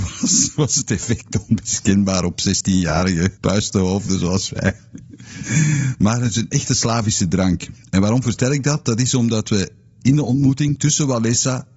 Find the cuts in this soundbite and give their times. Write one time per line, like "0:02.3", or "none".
0:03.4